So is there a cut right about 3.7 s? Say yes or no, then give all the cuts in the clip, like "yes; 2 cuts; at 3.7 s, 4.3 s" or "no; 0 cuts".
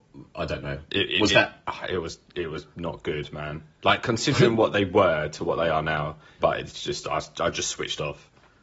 no; 1 cut; at 6.4 s